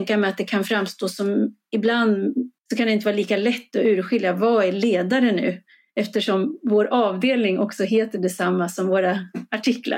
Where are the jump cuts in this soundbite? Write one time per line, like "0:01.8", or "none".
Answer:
0:02.6